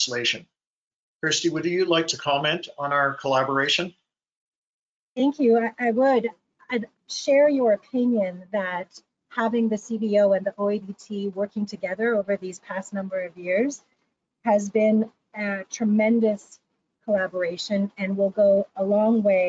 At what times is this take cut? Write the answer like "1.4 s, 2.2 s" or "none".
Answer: 6.9 s